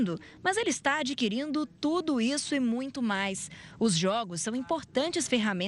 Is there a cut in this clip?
no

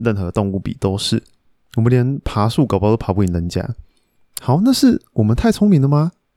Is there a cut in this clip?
no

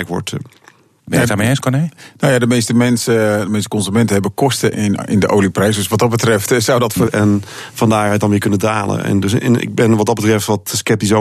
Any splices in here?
yes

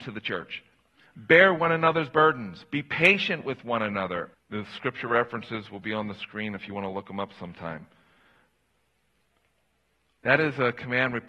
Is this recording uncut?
no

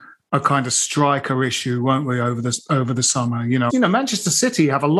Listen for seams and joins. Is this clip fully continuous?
no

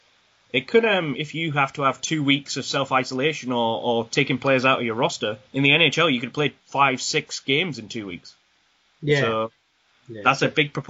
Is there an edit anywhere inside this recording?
yes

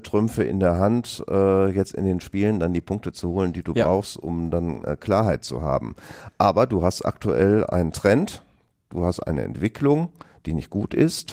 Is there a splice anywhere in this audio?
no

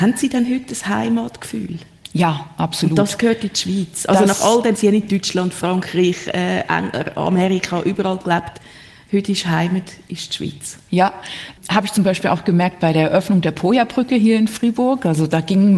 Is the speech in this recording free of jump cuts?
no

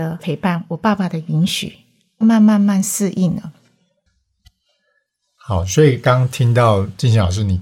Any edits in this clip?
yes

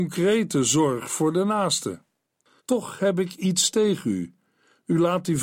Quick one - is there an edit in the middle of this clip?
yes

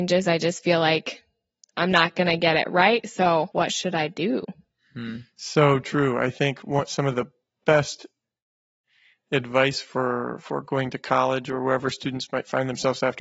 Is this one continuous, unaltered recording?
yes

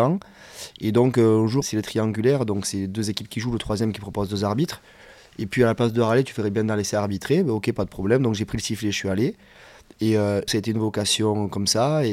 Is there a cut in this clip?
yes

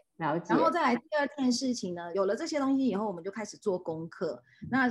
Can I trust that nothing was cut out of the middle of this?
yes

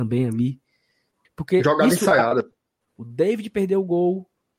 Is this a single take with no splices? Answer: no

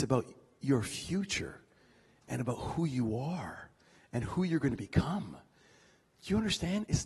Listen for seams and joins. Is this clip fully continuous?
yes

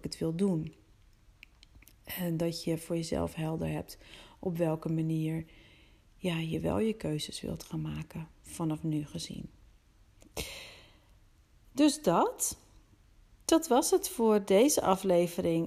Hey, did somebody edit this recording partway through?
no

